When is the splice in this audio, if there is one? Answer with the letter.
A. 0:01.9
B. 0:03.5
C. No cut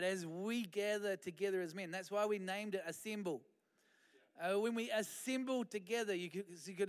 C